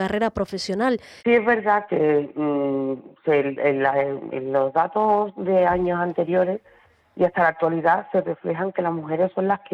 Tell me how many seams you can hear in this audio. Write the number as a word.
one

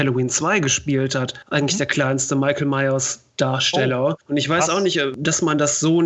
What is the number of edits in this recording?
zero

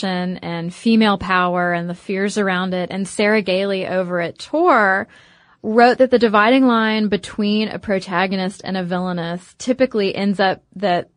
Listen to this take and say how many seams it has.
zero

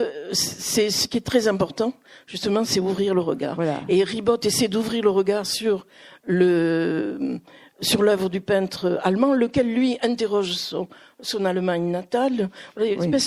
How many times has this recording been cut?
zero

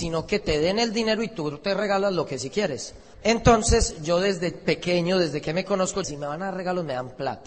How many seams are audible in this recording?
two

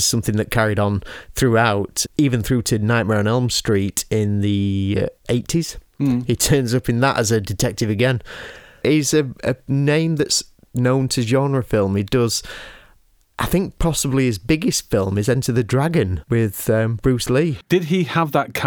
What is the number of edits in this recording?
one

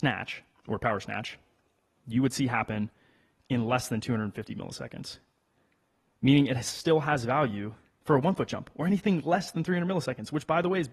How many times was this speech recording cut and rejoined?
zero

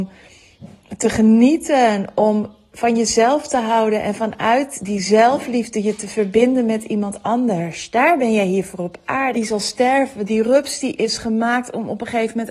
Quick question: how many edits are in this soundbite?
one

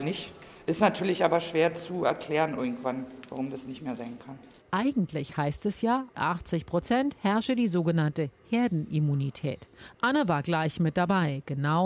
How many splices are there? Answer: two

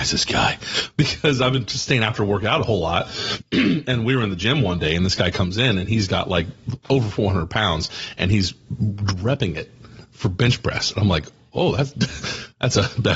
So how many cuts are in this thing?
one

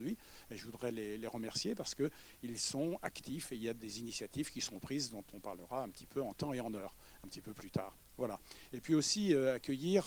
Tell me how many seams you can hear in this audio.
zero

